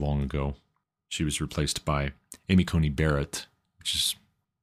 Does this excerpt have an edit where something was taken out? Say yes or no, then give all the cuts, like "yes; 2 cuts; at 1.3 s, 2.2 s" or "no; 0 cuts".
no; 0 cuts